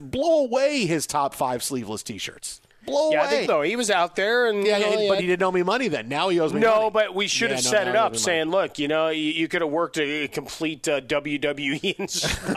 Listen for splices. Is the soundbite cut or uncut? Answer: cut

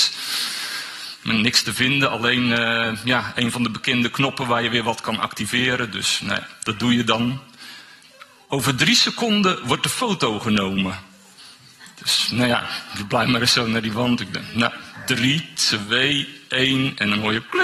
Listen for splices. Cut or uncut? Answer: uncut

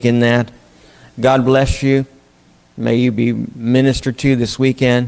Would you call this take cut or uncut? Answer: uncut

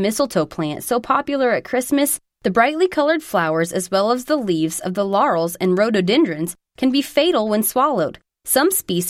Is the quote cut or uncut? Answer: uncut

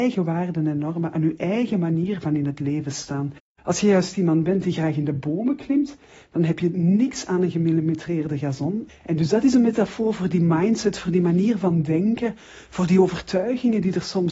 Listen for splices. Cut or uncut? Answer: cut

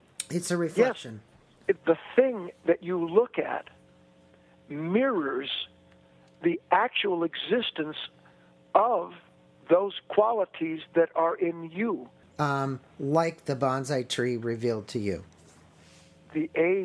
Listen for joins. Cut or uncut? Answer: cut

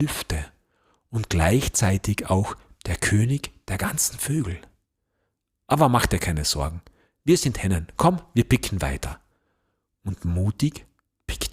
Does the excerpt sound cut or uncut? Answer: uncut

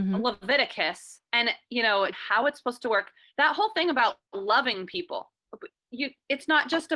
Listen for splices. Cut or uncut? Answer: cut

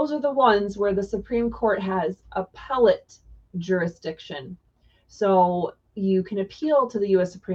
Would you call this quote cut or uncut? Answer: uncut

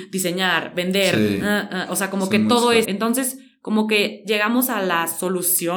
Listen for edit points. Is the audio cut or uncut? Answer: cut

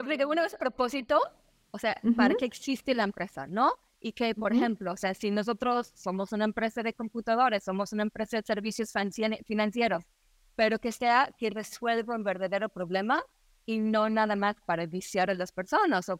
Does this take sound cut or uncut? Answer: uncut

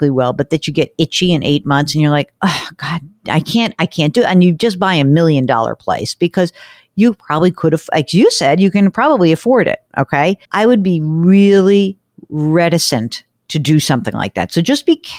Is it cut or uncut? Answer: cut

